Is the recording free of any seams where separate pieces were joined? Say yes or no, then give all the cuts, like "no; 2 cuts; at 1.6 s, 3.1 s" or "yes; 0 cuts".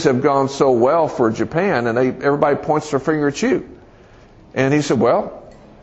yes; 0 cuts